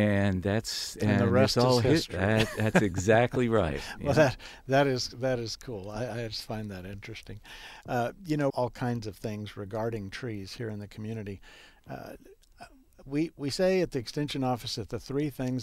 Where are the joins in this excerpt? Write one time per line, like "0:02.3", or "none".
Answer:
0:08.5